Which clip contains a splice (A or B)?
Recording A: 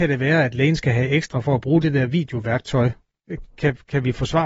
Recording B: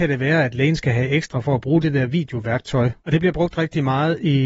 B